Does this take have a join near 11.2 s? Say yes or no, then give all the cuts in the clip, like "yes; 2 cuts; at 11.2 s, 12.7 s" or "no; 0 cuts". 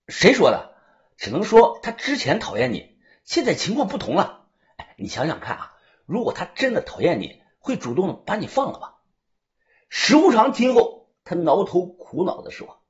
no; 0 cuts